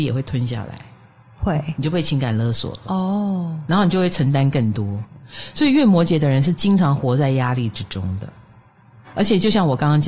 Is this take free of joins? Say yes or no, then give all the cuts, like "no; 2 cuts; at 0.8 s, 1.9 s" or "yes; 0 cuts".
yes; 0 cuts